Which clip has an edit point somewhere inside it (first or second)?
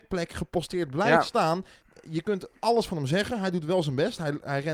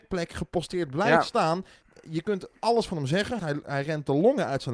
second